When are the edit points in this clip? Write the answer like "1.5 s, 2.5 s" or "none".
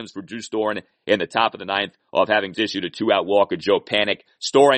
2.5 s